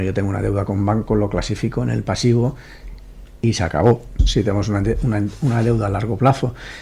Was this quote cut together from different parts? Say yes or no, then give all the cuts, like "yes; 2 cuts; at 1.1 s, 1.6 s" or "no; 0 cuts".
yes; 1 cut; at 4.2 s